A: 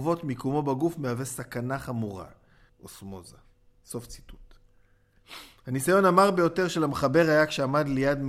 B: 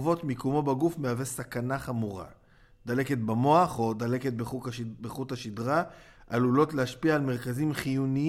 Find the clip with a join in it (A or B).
A